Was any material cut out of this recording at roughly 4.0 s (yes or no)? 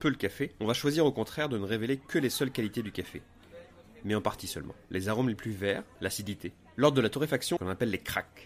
no